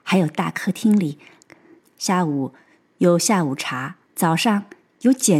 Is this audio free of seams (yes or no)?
no